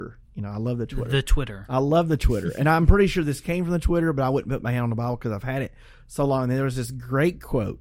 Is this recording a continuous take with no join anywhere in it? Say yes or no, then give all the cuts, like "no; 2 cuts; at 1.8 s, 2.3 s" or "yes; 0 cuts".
yes; 0 cuts